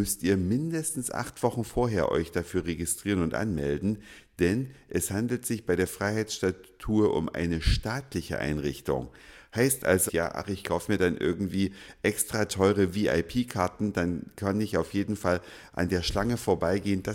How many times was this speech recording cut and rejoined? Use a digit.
1